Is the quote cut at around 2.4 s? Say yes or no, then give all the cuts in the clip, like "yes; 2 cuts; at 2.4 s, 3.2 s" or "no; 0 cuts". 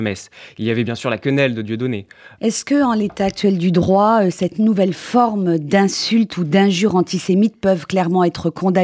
yes; 1 cut; at 2.4 s